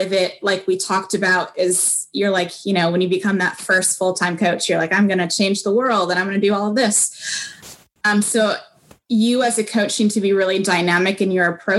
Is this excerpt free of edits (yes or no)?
no